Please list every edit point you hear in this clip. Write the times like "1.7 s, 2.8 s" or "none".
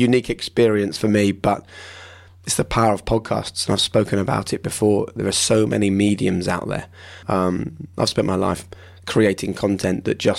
7.2 s